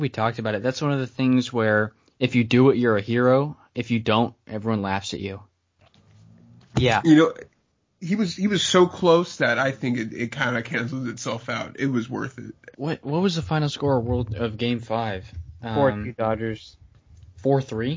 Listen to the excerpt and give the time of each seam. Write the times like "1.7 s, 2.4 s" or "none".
12.7 s